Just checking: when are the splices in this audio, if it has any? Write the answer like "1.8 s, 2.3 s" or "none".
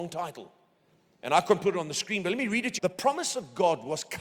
2.8 s